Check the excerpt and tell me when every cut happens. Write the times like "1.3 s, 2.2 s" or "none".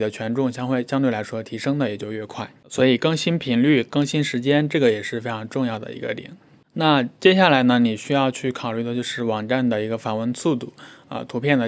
2.6 s